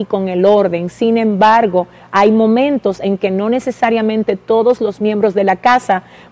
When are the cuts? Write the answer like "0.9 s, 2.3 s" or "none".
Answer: none